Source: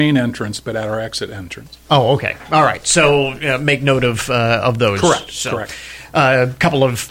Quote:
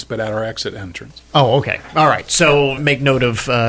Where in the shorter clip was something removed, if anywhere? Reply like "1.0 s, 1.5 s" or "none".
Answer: 2.8 s